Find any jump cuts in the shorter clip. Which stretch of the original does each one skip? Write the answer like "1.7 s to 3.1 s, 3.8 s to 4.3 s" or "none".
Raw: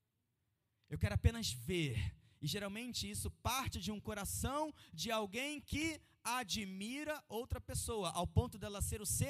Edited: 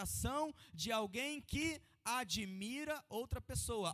none